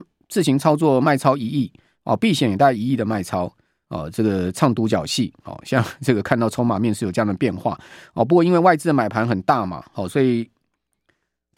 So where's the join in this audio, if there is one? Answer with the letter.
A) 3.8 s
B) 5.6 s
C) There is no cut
A